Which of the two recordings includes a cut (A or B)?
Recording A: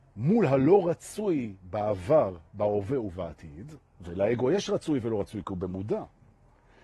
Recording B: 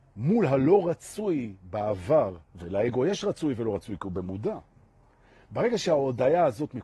B